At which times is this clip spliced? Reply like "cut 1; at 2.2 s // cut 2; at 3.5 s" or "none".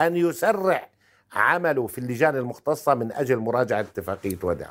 none